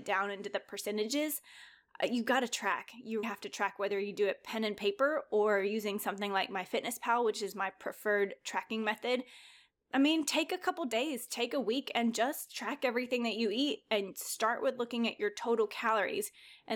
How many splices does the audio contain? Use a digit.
1